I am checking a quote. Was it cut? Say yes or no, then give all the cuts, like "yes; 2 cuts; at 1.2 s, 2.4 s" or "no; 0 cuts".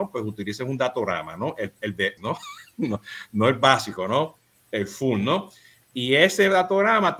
yes; 1 cut; at 2.2 s